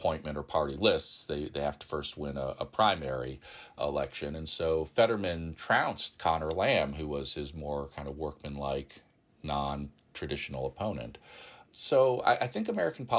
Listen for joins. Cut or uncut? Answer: uncut